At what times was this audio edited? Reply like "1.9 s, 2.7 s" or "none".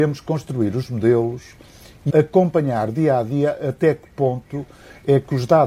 2.1 s